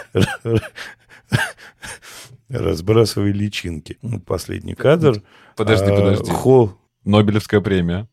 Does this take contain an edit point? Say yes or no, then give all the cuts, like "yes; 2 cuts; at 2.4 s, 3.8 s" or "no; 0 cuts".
yes; 1 cut; at 4.2 s